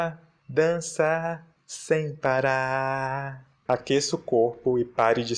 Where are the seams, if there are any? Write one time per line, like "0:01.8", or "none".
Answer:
0:03.7